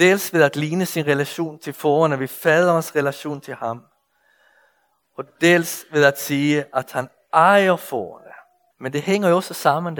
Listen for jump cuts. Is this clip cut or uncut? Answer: cut